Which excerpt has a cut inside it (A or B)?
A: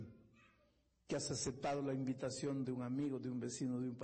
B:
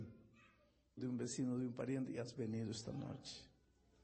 B